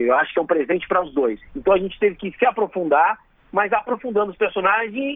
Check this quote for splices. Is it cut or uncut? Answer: cut